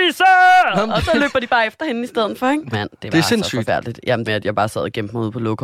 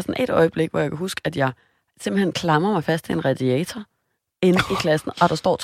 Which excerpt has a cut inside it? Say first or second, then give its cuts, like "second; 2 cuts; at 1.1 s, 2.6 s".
first; 2 cuts; at 2.7 s, 4.3 s